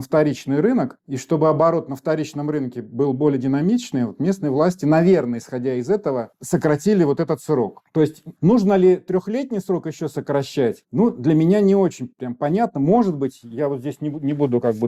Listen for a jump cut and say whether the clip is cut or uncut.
uncut